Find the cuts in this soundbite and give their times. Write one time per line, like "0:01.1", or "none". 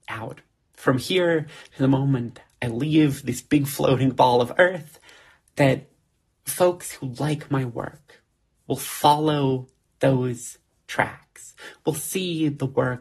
none